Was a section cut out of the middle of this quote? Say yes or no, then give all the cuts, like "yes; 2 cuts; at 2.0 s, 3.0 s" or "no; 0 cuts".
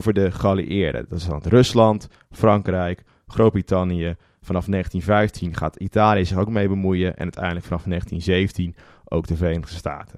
no; 0 cuts